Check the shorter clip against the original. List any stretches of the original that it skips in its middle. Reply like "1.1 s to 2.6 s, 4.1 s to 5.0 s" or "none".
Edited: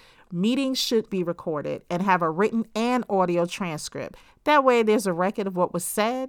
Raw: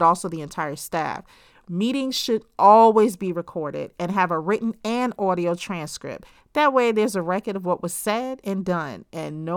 2.5 s to 3.2 s